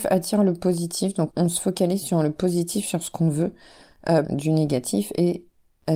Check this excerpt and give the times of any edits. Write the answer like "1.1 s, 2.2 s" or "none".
1.3 s, 4.2 s